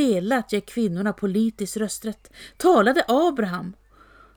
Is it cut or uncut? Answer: uncut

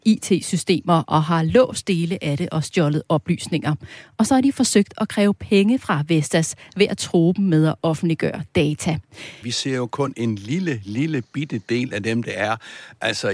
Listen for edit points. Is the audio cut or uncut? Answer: cut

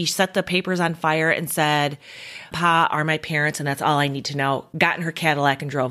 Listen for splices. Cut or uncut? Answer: cut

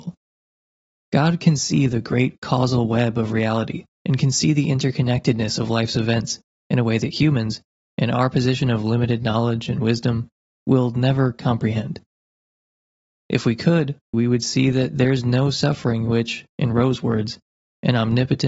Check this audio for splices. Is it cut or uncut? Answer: cut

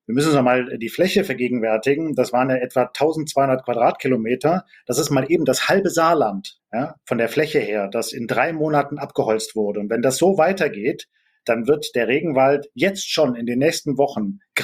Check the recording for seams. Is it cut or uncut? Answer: uncut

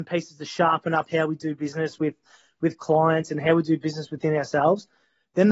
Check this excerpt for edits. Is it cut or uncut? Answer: uncut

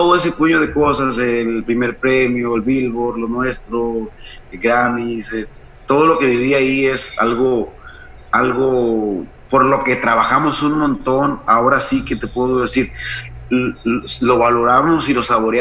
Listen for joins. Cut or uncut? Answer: uncut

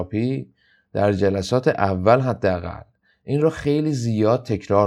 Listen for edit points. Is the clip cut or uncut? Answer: uncut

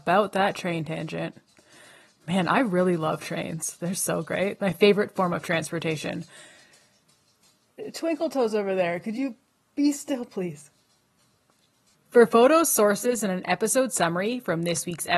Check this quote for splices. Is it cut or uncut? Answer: uncut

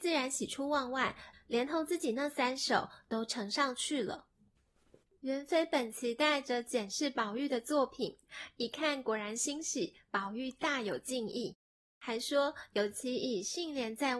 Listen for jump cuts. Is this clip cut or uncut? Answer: cut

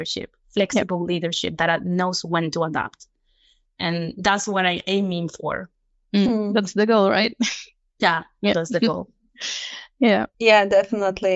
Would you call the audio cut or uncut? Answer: uncut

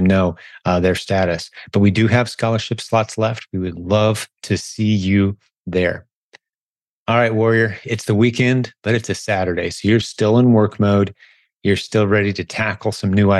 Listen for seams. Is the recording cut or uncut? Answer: uncut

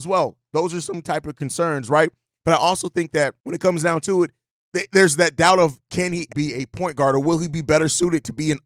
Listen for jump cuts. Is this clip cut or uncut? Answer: cut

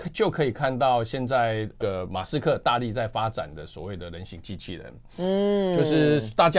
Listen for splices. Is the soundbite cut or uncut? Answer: uncut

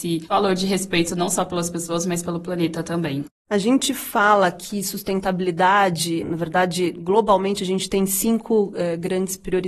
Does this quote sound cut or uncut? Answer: uncut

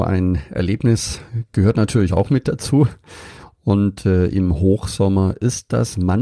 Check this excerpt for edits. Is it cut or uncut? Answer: uncut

